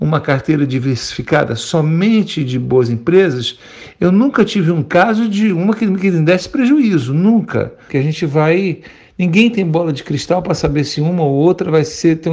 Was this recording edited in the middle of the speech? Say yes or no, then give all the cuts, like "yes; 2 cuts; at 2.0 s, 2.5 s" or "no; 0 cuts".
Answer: yes; 1 cut; at 7.9 s